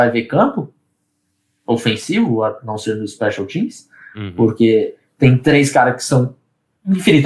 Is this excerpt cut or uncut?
uncut